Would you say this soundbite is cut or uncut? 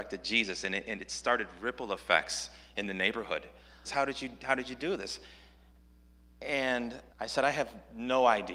cut